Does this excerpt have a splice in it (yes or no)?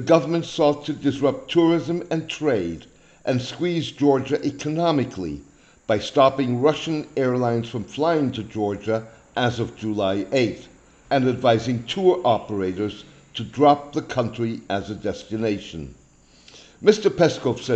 yes